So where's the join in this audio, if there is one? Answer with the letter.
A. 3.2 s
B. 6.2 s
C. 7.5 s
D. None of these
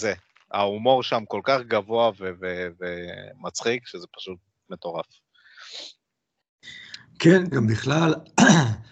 C